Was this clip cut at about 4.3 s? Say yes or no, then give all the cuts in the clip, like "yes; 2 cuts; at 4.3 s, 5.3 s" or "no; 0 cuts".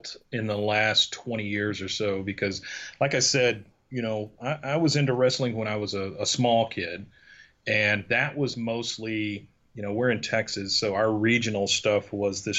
no; 0 cuts